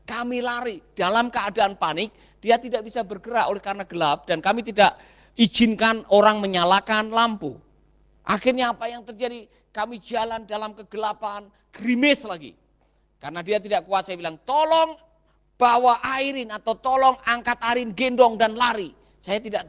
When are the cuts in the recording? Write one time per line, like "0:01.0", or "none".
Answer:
0:08.2